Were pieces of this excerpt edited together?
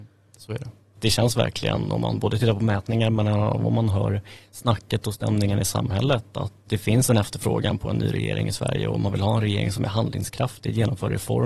yes; 2 cuts; at 1.0 s, 6.7 s

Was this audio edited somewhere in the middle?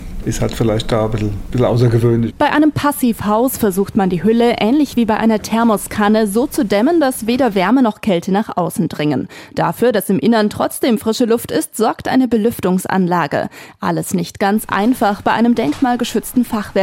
no; 0 cuts

